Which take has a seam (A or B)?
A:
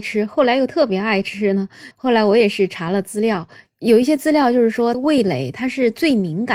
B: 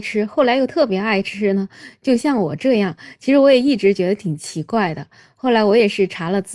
A